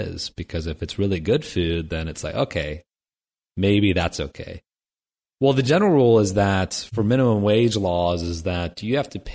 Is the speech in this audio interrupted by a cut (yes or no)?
no